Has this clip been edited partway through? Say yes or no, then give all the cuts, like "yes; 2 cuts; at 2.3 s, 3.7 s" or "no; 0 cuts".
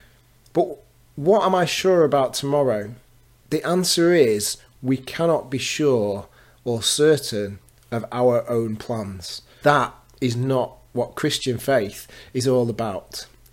yes; 2 cuts; at 3.4 s, 9.6 s